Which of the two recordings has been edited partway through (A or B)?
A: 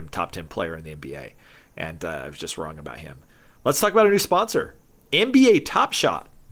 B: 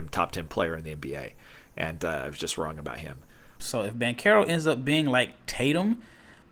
B